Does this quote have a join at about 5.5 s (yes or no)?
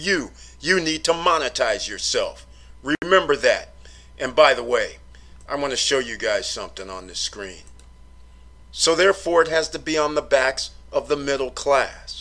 yes